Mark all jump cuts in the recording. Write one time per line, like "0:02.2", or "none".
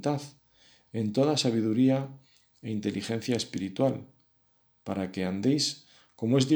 none